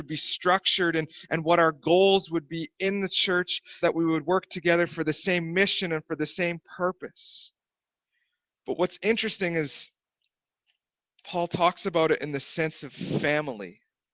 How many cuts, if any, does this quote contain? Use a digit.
1